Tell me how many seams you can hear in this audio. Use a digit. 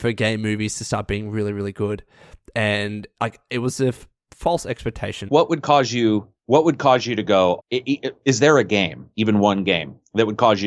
3